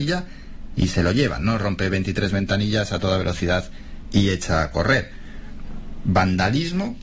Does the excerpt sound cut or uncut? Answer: uncut